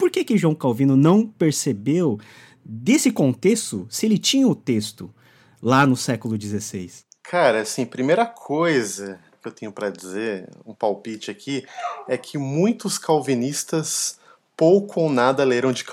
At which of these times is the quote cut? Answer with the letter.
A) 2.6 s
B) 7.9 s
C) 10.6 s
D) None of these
D